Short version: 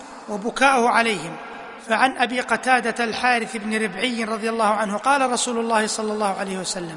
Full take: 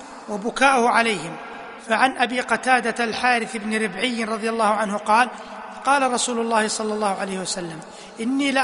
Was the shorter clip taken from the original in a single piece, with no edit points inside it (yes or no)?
no